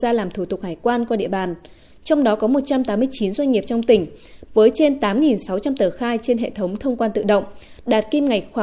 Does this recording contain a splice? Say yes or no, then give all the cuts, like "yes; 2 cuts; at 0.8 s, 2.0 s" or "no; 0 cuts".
yes; 1 cut; at 4.5 s